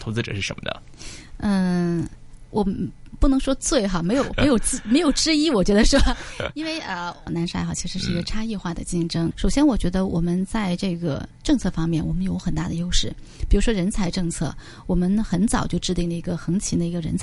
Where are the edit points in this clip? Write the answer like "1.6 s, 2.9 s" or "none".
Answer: 7.3 s, 9.3 s